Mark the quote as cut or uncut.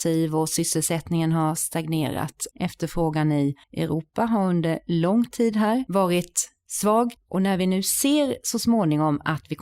cut